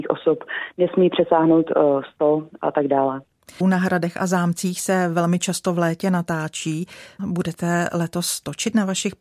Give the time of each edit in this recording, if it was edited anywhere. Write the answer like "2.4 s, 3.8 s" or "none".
3.6 s, 7.2 s